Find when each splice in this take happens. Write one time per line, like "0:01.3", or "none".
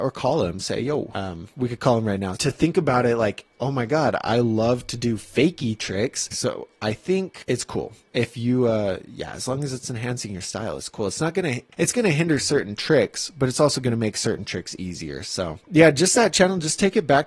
0:02.4
0:06.3
0:15.6